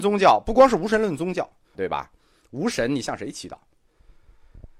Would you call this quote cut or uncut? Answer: cut